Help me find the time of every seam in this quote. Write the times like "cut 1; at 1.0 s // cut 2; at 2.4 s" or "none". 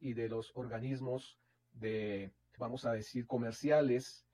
cut 1; at 2.6 s